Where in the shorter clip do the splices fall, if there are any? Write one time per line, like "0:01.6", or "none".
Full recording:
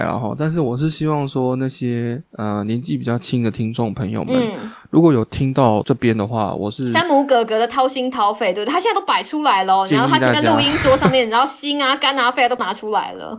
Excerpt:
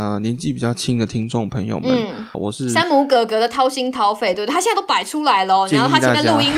0:02.3

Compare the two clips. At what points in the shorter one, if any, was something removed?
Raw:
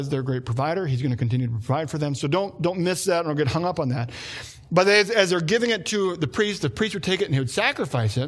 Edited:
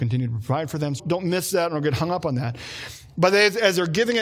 0:01.0

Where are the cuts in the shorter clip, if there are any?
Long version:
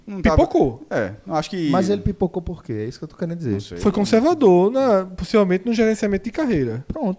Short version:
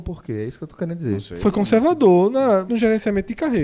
0:02.7

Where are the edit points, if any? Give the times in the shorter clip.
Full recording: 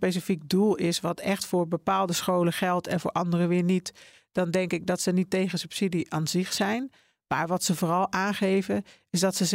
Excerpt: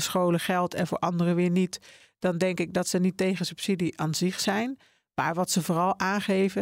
none

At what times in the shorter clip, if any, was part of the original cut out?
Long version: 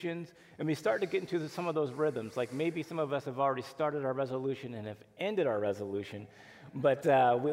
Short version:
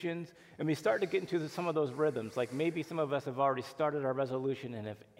none

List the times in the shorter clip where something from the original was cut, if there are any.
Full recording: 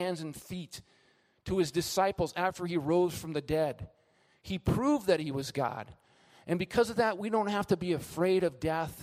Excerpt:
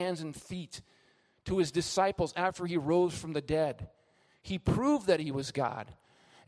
none

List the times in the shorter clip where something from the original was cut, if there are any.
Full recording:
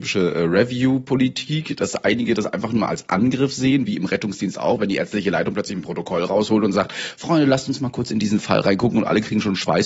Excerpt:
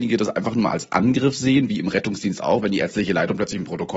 none

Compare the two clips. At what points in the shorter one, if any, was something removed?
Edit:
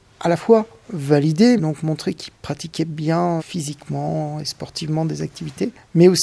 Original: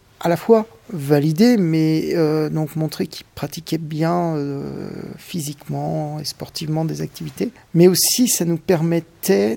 0:01.6
0:03.4

